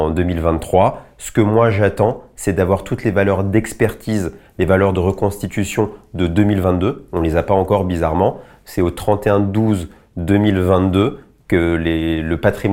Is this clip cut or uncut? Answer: uncut